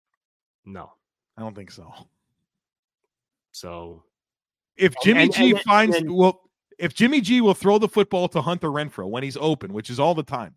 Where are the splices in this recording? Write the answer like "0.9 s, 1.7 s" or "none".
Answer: 4.8 s